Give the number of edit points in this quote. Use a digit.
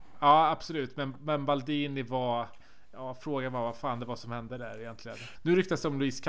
1